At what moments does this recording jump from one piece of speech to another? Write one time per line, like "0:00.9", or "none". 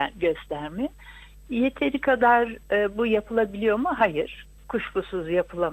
none